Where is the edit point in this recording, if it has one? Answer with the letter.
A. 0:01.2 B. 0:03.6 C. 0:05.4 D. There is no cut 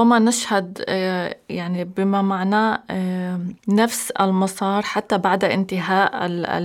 B